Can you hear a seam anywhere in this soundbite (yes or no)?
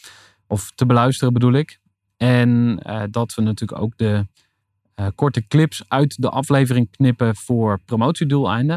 no